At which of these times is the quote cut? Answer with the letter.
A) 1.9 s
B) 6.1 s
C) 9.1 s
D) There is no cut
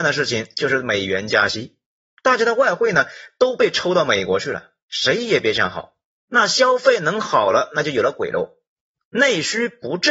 B